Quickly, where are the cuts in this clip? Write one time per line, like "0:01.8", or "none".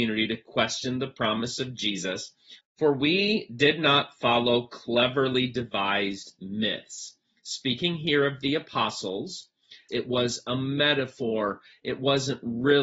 0:02.6
0:09.9